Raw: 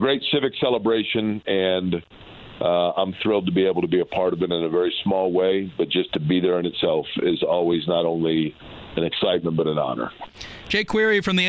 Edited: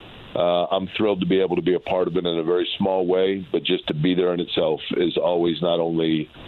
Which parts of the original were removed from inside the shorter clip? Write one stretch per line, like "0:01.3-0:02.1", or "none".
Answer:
none